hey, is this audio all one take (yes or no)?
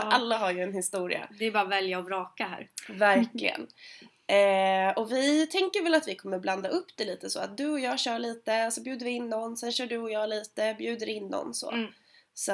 yes